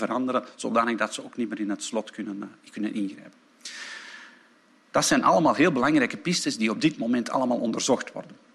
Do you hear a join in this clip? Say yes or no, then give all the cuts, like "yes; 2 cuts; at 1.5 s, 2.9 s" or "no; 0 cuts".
no; 0 cuts